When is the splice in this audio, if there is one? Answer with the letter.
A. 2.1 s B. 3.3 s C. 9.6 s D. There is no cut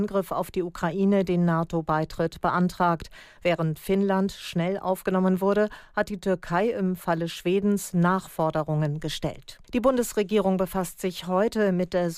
C